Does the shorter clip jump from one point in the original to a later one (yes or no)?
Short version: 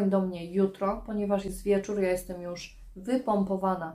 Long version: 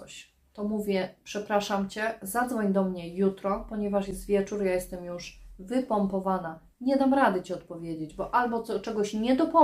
no